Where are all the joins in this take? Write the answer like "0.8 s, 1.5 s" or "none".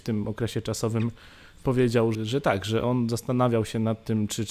2.1 s